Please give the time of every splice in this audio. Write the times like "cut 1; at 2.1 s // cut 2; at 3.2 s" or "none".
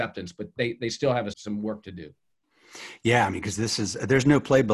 cut 1; at 1.3 s